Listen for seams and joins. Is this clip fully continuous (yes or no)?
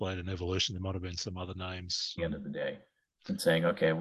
no